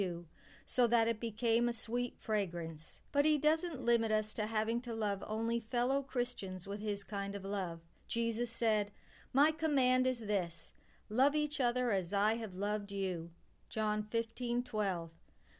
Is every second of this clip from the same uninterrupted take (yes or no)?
no